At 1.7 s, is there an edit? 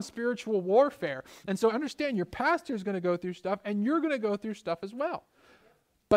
yes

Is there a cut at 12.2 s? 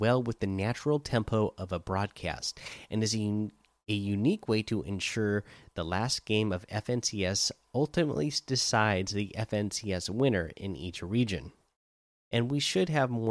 yes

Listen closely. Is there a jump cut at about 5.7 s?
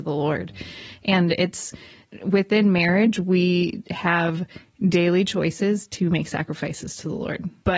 no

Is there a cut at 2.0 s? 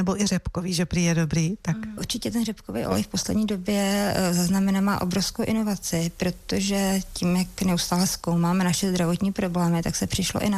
yes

